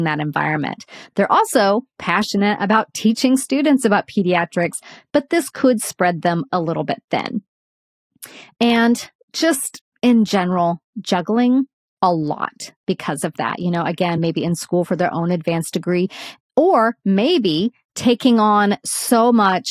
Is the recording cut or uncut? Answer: uncut